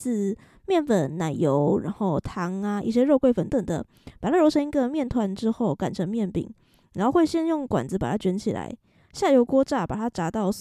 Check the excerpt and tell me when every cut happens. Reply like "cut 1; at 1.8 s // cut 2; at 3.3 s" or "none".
cut 1; at 3.5 s